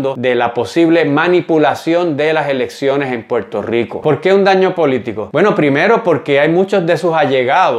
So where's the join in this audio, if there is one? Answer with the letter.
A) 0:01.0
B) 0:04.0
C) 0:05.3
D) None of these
B